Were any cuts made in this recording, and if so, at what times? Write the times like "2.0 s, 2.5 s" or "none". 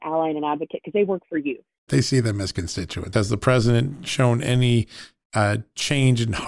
1.9 s, 3.1 s